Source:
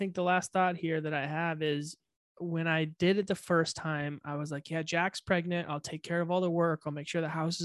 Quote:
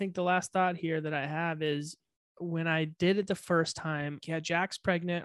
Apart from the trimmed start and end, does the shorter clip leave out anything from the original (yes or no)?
yes